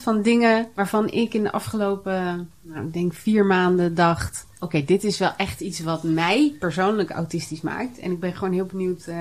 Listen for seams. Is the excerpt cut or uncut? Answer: uncut